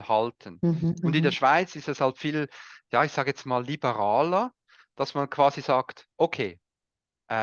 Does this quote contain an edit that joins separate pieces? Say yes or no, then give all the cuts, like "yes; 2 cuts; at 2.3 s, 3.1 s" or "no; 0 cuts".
no; 0 cuts